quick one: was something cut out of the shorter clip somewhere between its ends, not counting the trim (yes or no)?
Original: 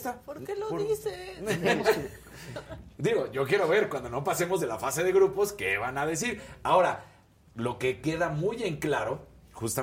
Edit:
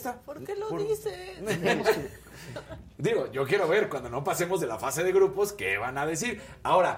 no